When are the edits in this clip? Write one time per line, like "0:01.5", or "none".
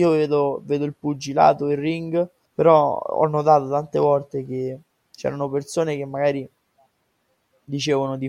0:02.5